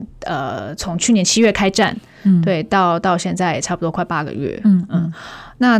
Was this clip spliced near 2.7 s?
no; 0 cuts

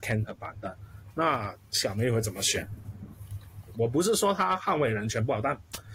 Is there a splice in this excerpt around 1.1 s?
no; 1 cut; at 3.7 s

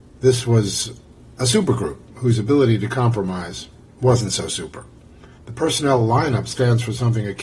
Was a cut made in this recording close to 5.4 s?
yes; 1 cut; at 5.4 s

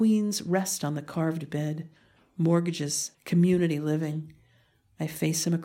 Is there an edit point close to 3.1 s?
yes; 1 cut; at 3.1 s

